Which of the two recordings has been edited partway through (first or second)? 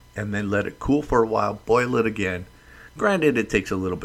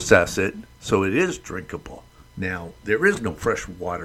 second